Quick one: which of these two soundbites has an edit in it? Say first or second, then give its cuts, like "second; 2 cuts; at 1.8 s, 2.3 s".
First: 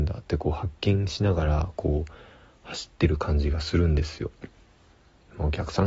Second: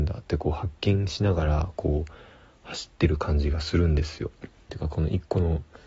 second; 1 cut; at 4.7 s